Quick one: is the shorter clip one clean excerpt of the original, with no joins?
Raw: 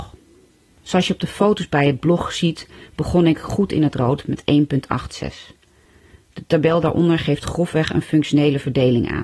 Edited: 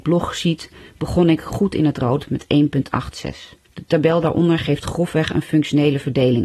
no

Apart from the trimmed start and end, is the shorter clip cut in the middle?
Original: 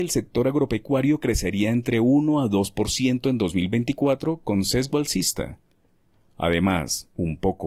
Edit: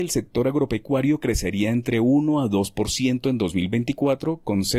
no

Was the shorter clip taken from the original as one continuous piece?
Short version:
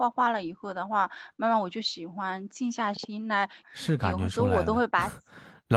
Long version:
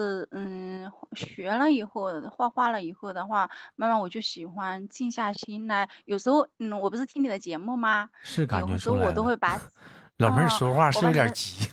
no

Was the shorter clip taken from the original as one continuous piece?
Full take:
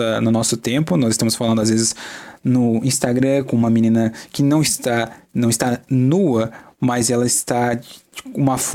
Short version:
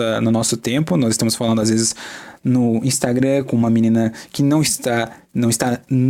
yes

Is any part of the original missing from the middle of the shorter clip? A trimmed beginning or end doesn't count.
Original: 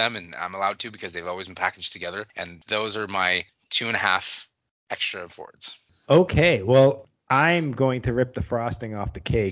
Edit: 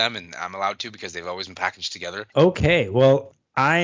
yes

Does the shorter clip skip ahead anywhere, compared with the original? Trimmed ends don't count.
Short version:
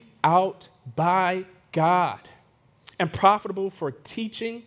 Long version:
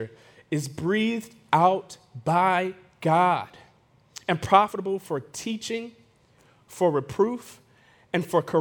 no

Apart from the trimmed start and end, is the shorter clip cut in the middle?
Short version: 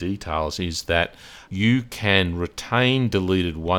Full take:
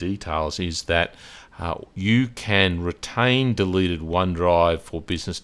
yes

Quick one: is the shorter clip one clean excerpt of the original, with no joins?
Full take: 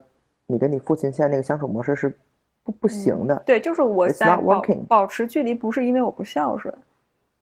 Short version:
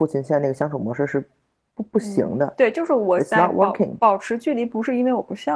yes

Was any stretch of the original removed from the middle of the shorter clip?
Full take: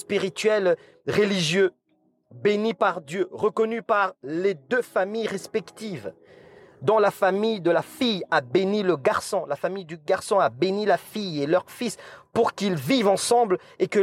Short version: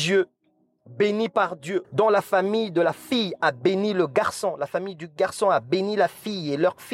yes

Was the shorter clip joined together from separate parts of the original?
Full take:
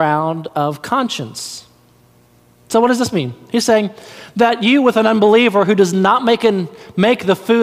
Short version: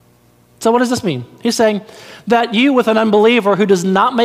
no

